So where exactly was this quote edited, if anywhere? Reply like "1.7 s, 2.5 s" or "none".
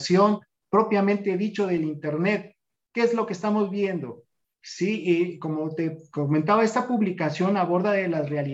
4.4 s